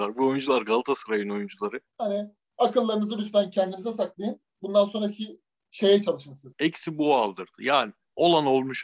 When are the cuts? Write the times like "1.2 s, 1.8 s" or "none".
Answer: 1.9 s, 6.5 s